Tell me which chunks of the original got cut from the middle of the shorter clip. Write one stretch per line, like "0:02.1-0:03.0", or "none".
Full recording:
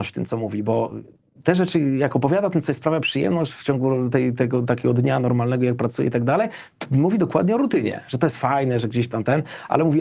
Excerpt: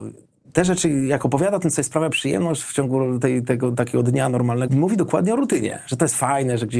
0:05.6-0:06.9